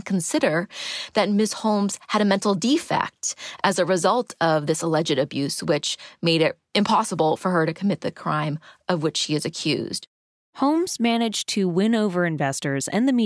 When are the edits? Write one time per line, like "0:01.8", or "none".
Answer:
none